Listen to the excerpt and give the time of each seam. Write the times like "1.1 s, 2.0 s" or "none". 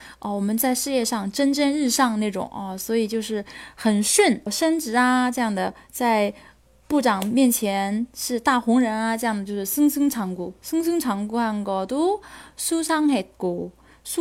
4.5 s